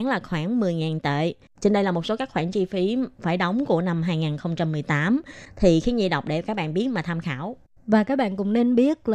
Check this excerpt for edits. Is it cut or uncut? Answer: cut